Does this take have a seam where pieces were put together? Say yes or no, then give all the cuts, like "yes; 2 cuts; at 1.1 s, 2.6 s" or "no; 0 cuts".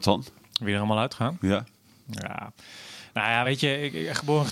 no; 0 cuts